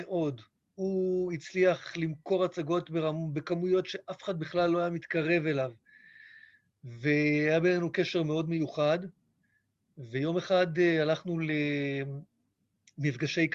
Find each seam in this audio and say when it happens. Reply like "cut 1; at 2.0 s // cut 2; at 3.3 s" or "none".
none